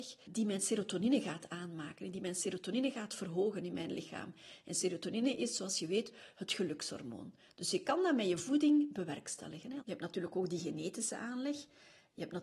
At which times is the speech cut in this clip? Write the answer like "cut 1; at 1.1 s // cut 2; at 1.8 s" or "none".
cut 1; at 9.8 s